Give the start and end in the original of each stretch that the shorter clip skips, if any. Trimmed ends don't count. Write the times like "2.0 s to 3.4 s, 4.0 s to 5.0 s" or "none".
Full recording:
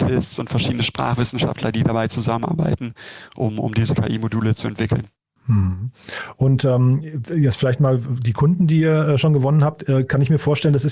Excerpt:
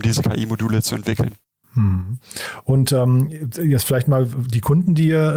none